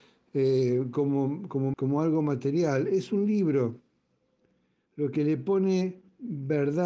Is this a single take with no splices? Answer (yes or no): no